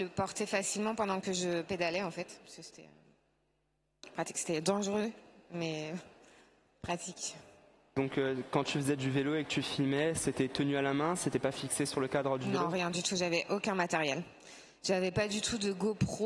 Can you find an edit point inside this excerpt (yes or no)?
no